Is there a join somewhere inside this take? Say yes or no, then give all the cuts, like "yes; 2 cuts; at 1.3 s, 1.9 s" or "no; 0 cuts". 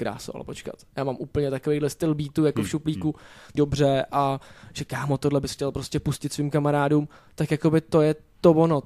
yes; 1 cut; at 3.6 s